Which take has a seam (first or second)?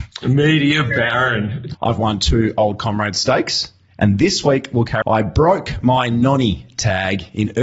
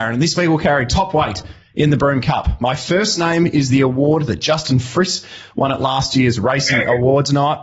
first